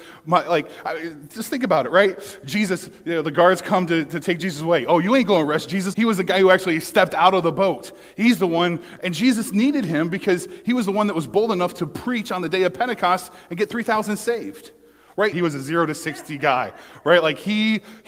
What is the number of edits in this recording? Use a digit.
2